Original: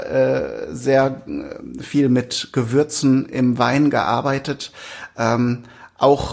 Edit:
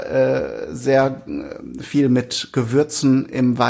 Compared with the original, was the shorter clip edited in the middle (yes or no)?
no